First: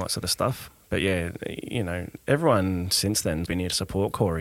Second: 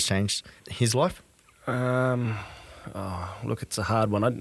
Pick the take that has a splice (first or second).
first